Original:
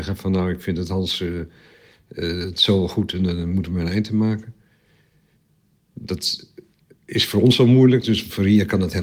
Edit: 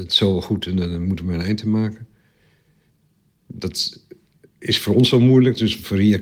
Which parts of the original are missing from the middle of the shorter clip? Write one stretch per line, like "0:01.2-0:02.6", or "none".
none